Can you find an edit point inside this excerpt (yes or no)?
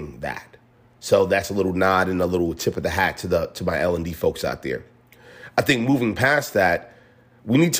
no